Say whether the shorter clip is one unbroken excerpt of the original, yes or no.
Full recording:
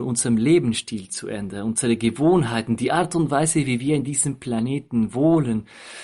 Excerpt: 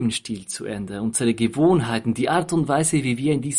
yes